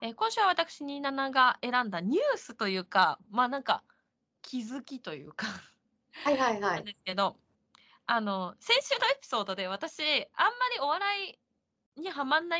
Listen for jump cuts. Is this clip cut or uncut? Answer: uncut